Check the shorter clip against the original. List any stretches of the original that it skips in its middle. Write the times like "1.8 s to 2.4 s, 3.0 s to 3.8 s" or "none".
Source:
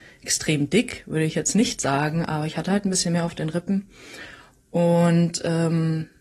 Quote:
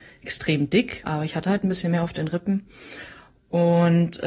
1.0 s to 2.2 s